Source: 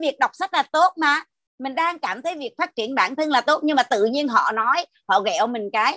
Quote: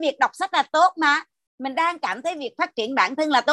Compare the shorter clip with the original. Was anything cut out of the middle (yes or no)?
no